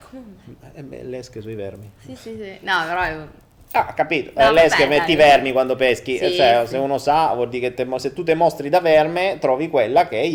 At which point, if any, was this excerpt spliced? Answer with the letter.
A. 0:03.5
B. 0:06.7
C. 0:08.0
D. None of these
D